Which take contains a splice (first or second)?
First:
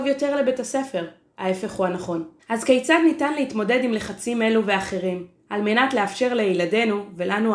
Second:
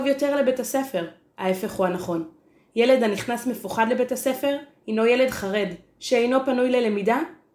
first